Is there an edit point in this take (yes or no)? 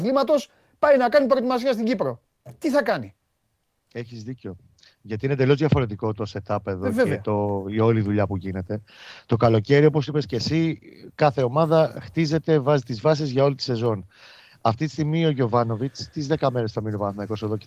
yes